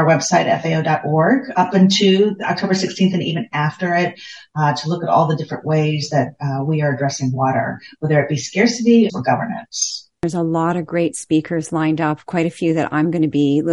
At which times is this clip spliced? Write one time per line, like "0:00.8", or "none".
0:09.1